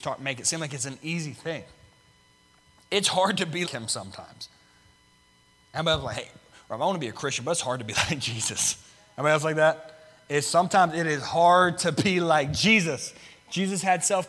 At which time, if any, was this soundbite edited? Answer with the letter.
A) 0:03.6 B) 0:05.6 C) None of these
A